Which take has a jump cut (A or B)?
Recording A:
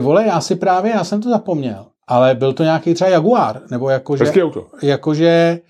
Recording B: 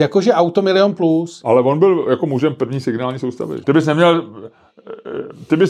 B